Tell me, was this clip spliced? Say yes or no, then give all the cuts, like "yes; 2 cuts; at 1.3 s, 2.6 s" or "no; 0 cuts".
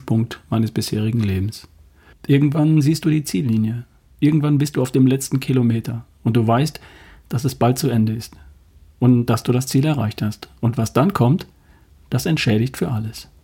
yes; 1 cut; at 2.1 s